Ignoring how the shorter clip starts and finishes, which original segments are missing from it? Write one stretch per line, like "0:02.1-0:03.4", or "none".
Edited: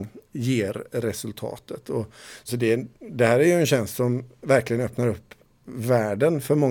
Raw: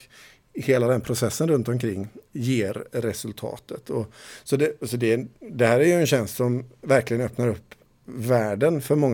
0:04.5-0:04.9